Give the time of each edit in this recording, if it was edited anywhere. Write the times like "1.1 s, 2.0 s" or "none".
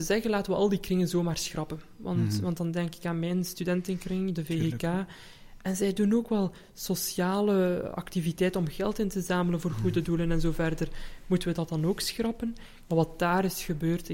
12.9 s